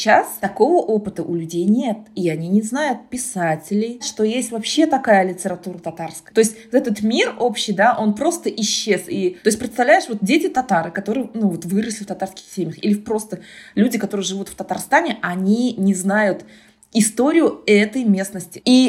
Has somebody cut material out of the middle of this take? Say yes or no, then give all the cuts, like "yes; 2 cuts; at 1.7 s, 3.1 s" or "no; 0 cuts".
no; 0 cuts